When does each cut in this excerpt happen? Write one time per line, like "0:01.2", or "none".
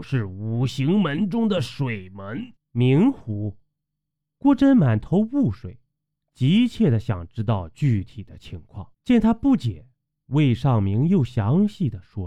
0:02.6
0:08.9